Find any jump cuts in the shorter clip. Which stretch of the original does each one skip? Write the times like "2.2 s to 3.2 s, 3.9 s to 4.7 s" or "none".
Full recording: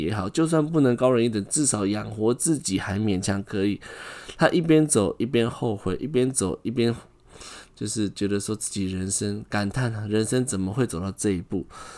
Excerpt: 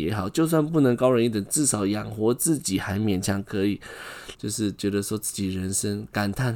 4.3 s to 7.7 s